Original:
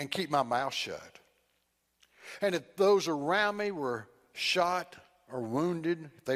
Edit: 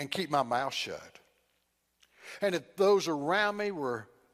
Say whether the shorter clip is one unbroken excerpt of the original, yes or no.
yes